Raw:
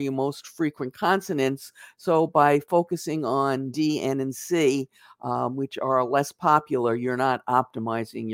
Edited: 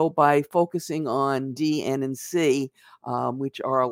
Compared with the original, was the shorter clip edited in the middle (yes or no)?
no